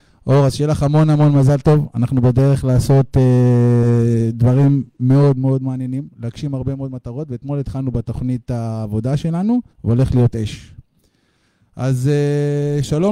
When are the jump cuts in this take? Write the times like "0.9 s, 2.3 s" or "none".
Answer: 9.7 s